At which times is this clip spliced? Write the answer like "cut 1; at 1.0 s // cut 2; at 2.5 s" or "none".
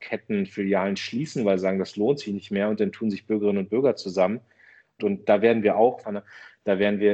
cut 1; at 5.0 s // cut 2; at 6.0 s